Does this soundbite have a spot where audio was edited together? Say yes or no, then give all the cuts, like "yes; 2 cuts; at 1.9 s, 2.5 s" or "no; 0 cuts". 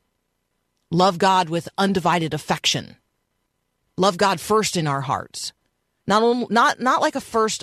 no; 0 cuts